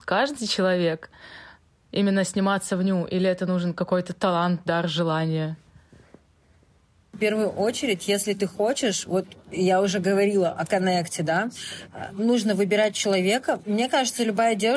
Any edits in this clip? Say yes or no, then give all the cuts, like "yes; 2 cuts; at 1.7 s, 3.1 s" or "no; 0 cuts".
yes; 1 cut; at 13.6 s